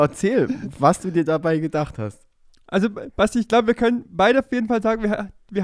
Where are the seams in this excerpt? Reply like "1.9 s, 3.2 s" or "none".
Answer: none